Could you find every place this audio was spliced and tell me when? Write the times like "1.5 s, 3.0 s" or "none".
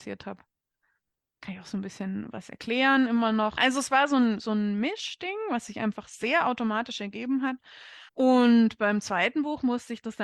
3.6 s, 8.1 s